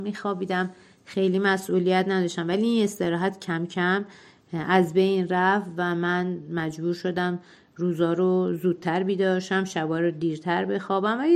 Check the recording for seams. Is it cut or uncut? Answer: uncut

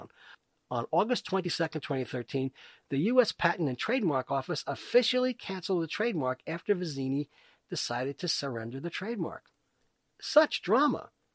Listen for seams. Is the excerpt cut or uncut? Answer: uncut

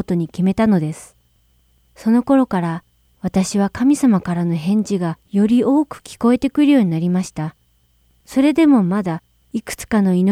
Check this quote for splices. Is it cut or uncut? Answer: uncut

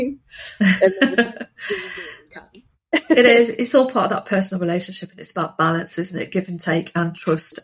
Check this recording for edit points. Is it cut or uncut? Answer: uncut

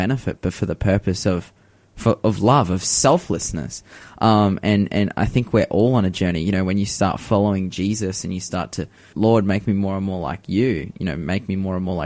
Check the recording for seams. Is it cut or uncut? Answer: cut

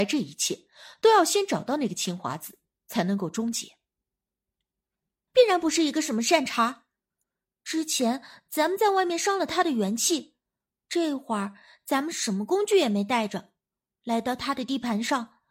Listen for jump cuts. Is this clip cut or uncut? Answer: cut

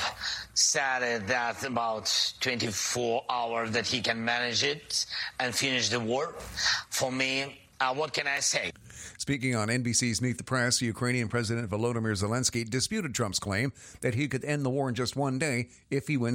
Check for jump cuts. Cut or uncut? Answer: uncut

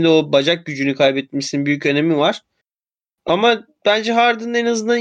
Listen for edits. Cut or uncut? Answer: uncut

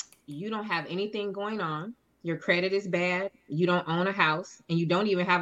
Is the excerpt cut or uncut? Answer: uncut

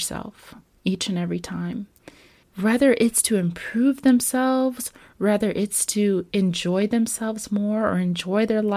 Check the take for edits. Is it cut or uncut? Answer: cut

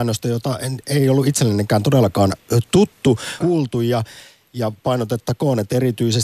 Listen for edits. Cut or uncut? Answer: cut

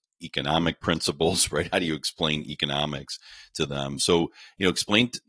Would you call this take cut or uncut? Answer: uncut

